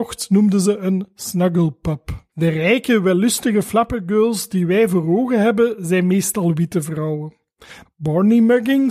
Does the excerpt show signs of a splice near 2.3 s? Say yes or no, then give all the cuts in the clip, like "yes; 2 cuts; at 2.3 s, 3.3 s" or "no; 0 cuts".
yes; 2 cuts; at 2.3 s, 7.9 s